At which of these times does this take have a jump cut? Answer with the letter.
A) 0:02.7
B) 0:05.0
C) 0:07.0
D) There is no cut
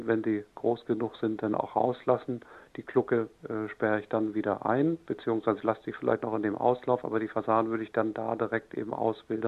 D